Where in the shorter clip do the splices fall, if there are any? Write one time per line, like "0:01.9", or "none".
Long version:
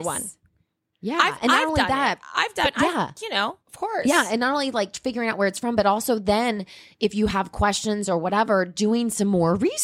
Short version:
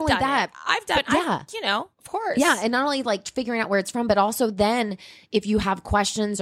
none